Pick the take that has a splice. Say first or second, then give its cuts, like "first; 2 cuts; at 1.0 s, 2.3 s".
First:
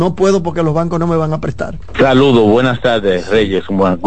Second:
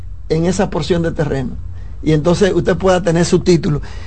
first; 1 cut; at 1.9 s